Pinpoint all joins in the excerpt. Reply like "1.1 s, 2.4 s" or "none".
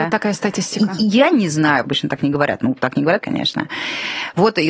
1.8 s, 3.2 s